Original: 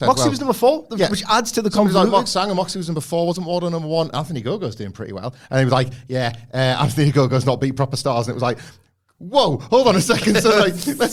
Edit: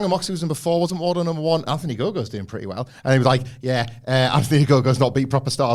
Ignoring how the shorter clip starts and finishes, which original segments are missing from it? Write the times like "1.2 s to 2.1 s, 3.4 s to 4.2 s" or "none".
none

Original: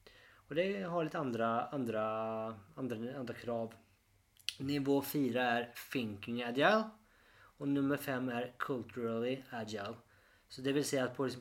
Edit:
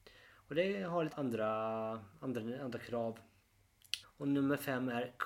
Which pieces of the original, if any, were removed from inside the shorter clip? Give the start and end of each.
1.1 s to 1.7 s, 4.6 s to 7.4 s

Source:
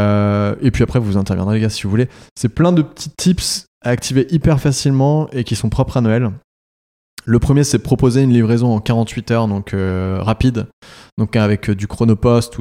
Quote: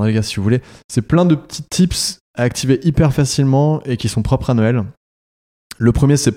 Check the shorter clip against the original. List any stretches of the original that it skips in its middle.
none

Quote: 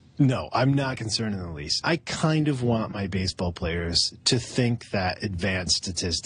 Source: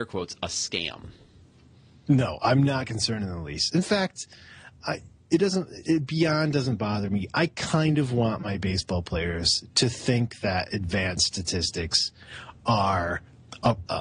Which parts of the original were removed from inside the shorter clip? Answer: 3.7 s to 7.3 s

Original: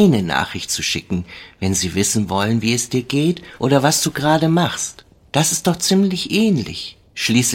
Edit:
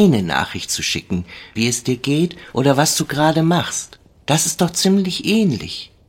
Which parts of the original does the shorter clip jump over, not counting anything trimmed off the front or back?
1.6 s to 2.6 s

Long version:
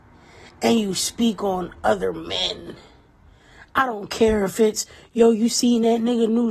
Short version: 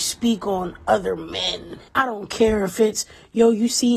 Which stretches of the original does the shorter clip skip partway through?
2.8 s to 3.7 s

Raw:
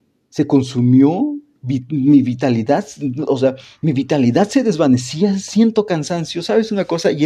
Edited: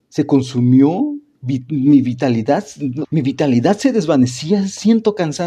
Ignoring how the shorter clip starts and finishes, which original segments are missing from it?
3.3 s to 3.8 s

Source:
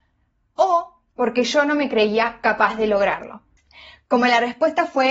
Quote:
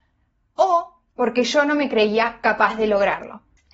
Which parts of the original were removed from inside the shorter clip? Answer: none

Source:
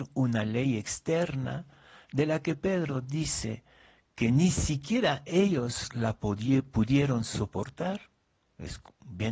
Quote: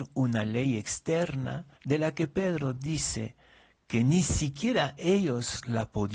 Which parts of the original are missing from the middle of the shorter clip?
1.8 s to 2.0 s

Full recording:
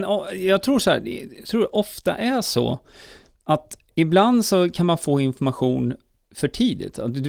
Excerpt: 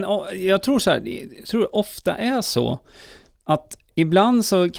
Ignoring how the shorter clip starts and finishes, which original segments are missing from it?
none

